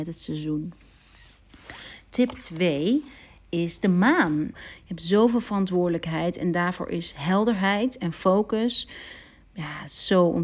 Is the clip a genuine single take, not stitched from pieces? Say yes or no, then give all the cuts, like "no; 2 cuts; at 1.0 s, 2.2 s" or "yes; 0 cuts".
no; 1 cut; at 4.5 s